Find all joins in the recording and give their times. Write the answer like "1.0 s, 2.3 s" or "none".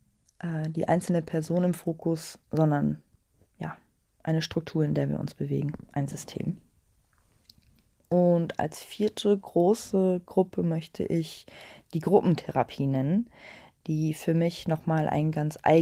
none